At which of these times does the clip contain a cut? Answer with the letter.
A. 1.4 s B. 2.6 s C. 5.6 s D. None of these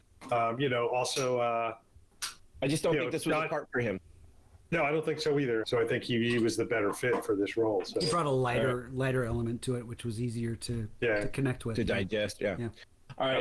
C